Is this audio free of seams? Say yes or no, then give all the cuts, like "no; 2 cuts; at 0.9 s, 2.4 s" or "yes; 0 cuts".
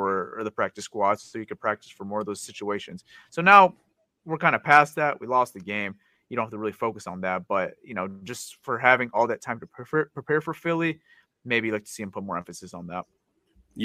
yes; 0 cuts